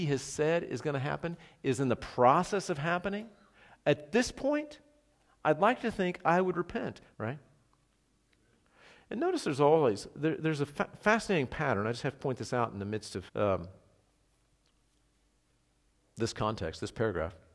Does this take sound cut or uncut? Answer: cut